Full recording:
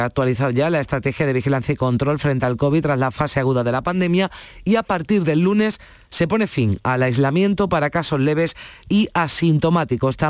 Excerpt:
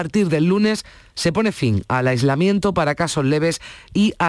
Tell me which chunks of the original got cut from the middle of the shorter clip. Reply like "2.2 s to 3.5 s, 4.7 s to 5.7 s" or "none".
none